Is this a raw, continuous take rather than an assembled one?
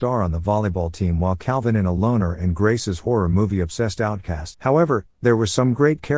no; 1 cut; at 4.5 s

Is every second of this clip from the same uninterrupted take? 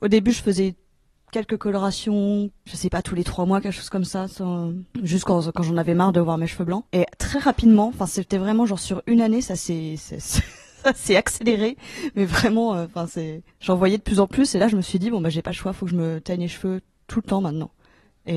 yes; 0 cuts

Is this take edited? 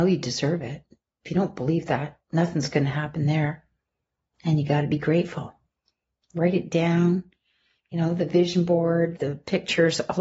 yes; 1 cut; at 9.2 s

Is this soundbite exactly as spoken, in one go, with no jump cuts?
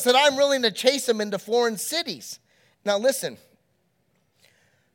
no; 1 cut; at 2.7 s

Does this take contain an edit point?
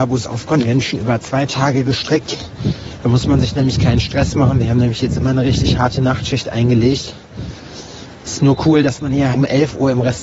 yes; 1 cut; at 9.3 s

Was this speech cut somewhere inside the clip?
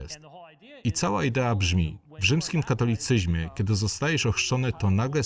no; 0 cuts

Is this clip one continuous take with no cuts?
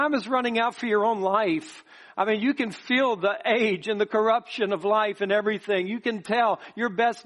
yes; 0 cuts

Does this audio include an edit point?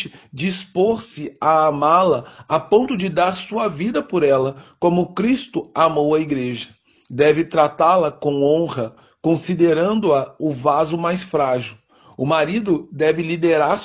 no; 0 cuts

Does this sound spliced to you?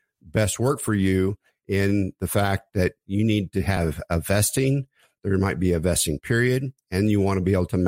yes; 1 cut; at 3.0 s

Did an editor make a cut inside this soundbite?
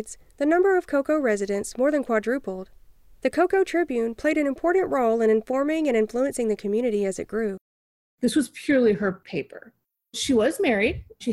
no; 0 cuts

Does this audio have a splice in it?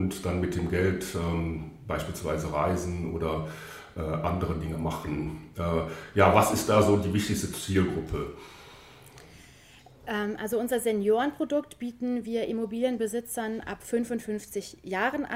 no; 0 cuts

